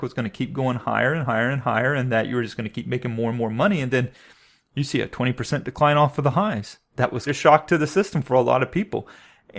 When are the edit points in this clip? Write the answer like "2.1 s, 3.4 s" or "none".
7.3 s